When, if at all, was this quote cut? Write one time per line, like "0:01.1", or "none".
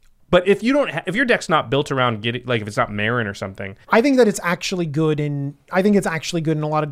0:03.8